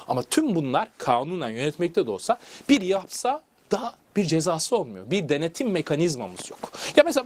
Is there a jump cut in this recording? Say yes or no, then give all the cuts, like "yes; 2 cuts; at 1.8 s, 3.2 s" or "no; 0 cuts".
no; 0 cuts